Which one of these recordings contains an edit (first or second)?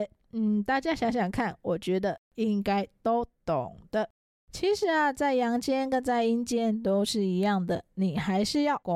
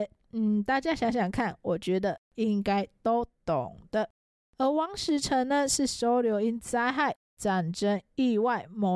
first